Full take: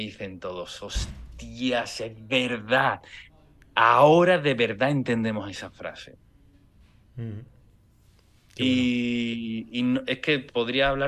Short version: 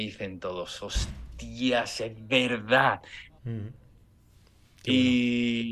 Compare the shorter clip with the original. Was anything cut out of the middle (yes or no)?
yes